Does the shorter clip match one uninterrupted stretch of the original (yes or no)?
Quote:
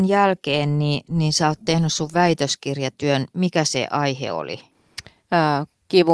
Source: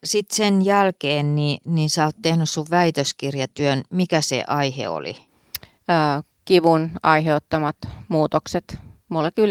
yes